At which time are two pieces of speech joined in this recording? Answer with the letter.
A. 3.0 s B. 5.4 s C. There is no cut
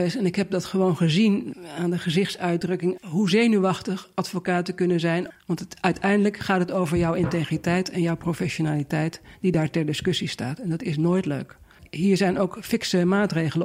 A